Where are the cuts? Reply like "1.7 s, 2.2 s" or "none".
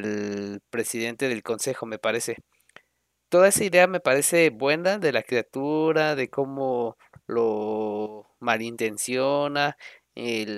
3.2 s